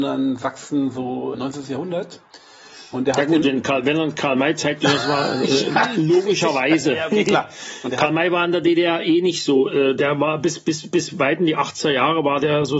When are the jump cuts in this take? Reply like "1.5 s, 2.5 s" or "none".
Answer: 1.3 s